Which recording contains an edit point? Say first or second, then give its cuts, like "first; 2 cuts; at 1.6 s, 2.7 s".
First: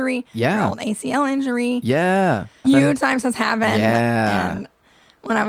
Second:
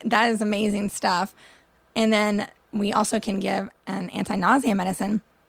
first; 1 cut; at 2.6 s